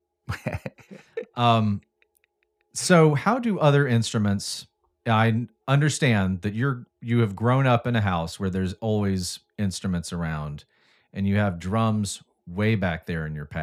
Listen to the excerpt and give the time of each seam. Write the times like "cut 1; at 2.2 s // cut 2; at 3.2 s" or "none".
none